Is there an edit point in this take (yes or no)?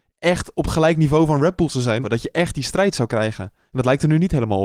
yes